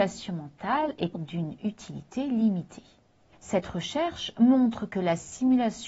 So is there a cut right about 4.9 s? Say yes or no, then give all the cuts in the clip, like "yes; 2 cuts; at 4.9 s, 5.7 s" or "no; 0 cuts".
no; 2 cuts; at 1.1 s, 3.3 s